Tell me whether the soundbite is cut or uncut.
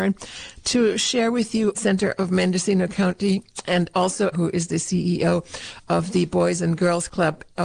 cut